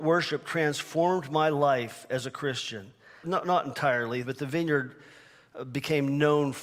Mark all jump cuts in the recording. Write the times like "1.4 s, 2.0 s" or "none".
3.2 s, 4.2 s